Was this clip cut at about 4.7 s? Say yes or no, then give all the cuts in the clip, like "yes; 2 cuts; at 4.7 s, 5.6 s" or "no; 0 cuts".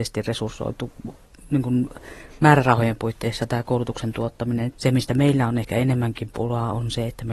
yes; 1 cut; at 4.7 s